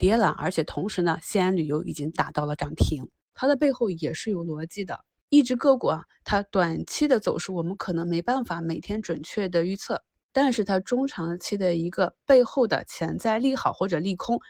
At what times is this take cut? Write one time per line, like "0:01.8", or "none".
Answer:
0:03.3
0:05.2